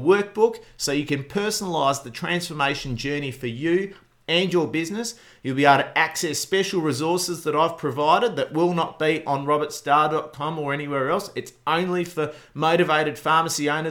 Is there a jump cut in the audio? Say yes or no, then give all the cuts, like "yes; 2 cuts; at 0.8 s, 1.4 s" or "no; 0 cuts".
no; 0 cuts